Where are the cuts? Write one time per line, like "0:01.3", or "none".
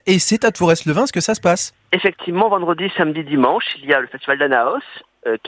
0:01.8